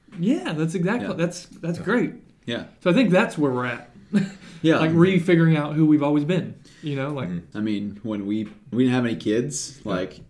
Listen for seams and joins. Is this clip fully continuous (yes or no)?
no